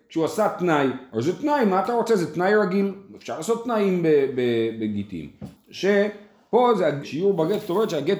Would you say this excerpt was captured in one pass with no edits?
no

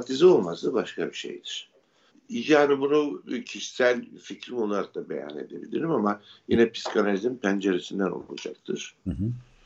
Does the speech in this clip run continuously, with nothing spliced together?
no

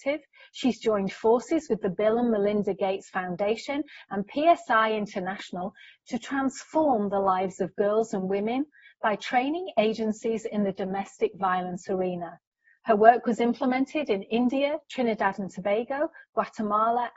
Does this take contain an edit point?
no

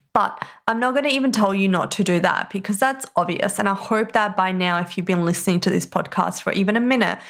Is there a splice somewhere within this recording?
no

